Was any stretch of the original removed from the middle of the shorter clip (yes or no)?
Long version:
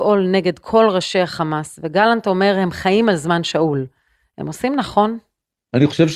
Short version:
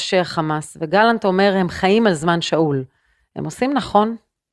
no